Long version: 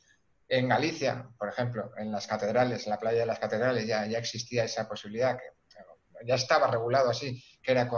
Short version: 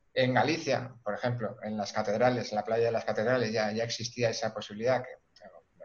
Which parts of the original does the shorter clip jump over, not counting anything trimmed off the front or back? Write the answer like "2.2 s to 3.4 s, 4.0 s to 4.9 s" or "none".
none